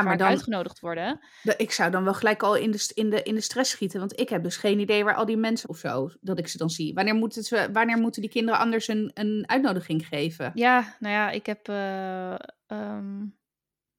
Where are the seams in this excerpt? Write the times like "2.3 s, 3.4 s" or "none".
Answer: 5.6 s

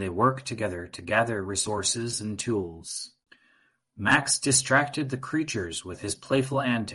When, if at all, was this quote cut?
none

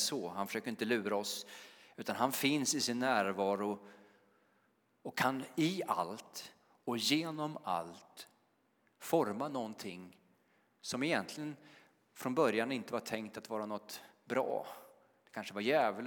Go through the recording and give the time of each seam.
none

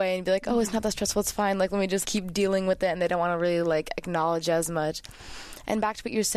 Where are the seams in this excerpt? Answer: 2.0 s

